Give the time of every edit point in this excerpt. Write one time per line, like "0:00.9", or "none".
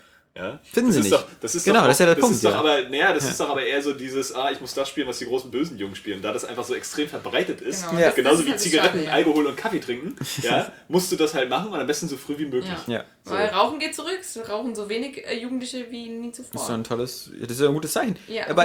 none